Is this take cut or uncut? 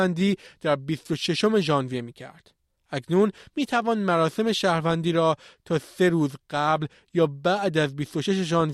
uncut